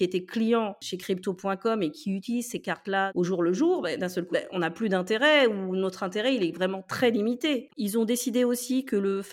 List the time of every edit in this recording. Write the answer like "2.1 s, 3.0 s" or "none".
4.3 s, 7.7 s